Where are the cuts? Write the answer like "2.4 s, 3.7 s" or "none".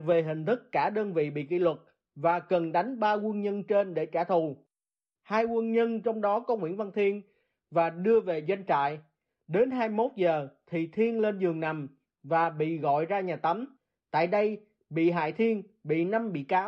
none